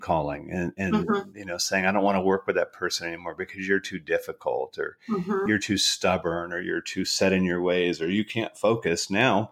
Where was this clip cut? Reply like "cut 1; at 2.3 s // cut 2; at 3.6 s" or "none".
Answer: none